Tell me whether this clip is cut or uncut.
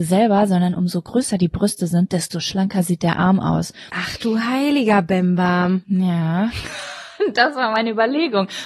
cut